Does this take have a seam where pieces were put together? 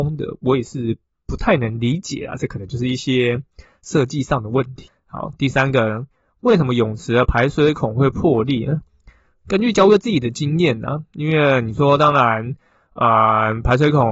no; 0 cuts

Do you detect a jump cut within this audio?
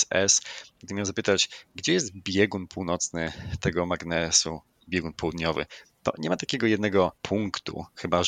yes; 1 cut; at 7.2 s

